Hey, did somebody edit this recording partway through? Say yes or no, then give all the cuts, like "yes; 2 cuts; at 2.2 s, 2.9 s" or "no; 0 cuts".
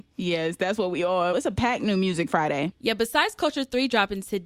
yes; 1 cut; at 1.3 s